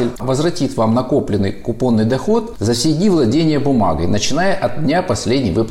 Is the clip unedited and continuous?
yes; 0 cuts

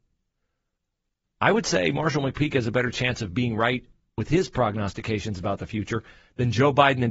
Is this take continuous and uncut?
no; 1 cut; at 1.2 s

